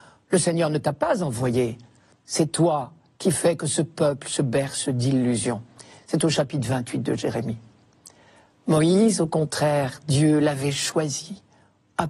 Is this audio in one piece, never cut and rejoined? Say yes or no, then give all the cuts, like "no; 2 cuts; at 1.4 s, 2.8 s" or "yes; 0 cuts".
yes; 0 cuts